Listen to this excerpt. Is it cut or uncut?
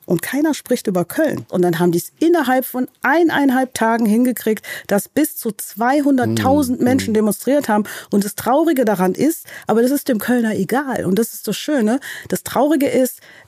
cut